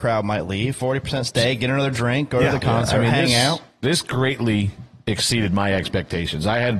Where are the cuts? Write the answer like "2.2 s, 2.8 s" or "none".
none